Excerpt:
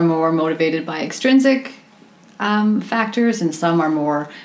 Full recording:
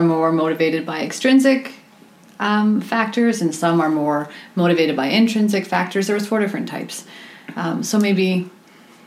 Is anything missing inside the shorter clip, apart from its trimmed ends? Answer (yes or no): no